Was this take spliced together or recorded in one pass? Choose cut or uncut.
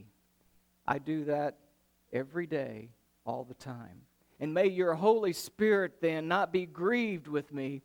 cut